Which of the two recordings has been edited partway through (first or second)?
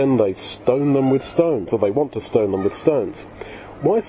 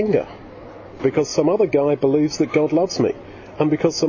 second